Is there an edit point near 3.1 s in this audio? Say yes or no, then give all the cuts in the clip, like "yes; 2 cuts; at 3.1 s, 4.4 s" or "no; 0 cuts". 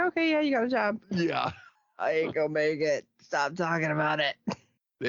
no; 1 cut; at 1.0 s